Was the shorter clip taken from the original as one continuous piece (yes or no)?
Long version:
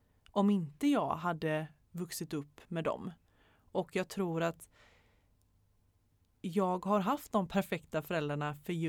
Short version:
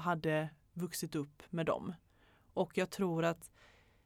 yes